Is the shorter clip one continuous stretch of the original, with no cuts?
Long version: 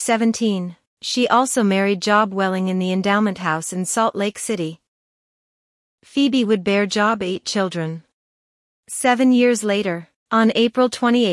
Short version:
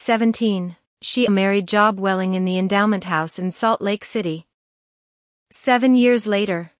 no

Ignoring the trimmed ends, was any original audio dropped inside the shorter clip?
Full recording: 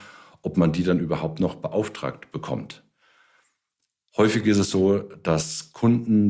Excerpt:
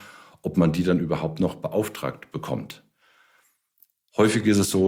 no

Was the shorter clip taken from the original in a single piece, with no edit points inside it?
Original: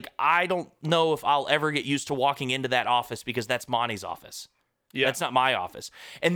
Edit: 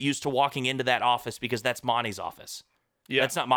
yes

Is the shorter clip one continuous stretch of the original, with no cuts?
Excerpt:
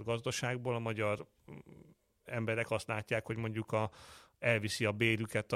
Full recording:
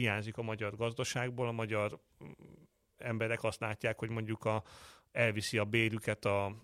yes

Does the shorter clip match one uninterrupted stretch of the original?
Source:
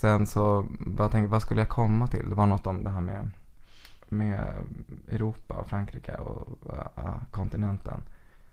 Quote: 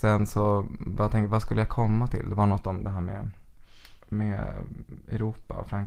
yes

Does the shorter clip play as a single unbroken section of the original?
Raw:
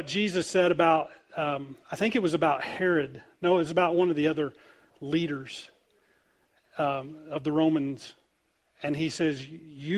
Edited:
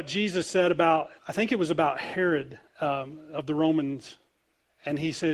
no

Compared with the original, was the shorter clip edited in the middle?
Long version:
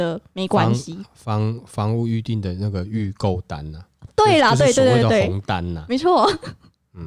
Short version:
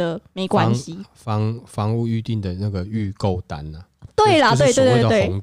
no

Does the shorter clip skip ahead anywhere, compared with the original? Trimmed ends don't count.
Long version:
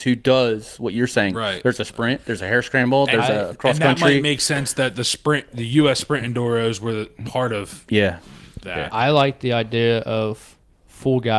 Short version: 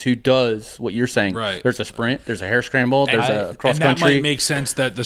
no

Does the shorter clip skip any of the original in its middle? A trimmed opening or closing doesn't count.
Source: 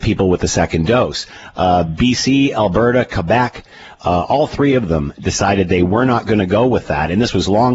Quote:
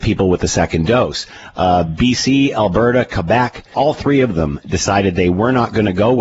yes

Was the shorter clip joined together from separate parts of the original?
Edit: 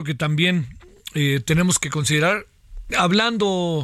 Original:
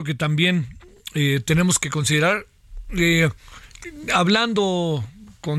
yes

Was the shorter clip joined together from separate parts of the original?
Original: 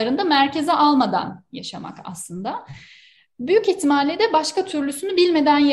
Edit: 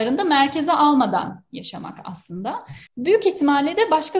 yes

